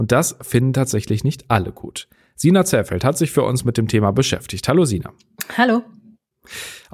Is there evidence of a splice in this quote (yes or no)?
no